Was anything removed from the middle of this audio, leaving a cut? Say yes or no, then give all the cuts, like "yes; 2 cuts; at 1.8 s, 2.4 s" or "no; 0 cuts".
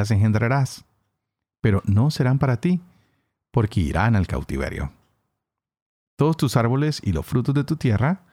no; 0 cuts